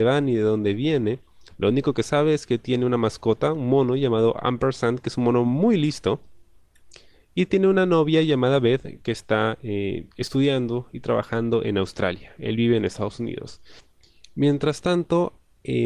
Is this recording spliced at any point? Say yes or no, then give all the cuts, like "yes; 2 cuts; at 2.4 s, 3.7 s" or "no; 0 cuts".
no; 0 cuts